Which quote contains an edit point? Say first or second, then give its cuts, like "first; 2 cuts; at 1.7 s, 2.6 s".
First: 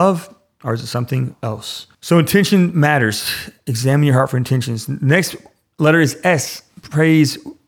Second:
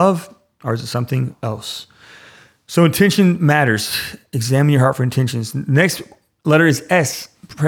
first; 1 cut; at 1.9 s